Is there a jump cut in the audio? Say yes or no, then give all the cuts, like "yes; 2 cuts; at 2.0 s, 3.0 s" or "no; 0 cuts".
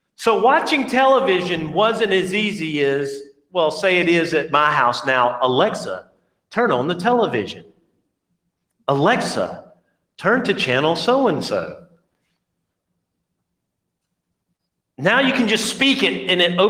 no; 0 cuts